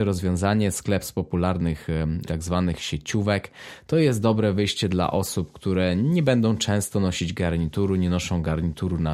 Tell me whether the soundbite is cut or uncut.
cut